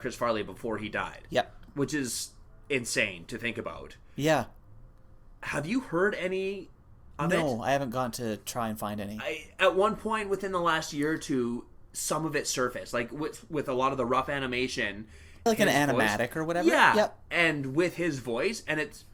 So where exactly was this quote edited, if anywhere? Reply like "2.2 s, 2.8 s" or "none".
15.5 s

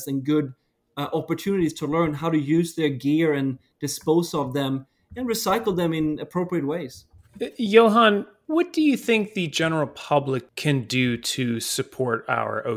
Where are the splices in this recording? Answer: none

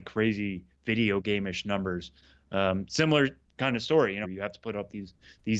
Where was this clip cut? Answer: 4.2 s

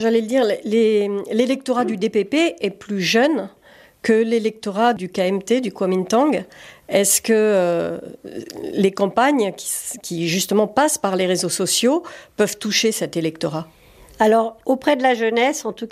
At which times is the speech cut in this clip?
none

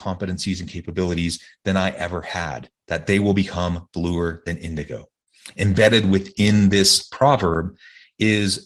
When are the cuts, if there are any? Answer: none

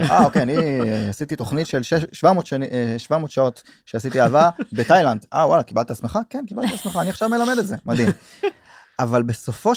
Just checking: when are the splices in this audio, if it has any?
none

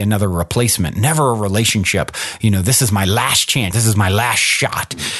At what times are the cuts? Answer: 3.7 s

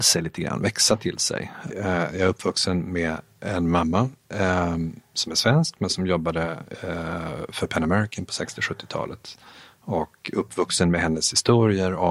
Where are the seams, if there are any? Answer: 1.7 s

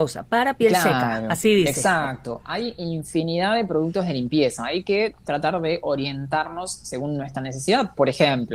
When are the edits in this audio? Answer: none

